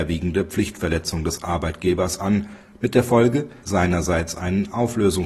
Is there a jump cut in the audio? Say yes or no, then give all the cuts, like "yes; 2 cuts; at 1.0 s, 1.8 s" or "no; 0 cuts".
yes; 1 cut; at 3.6 s